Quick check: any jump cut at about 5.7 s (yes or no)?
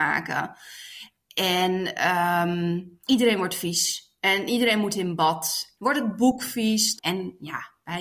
yes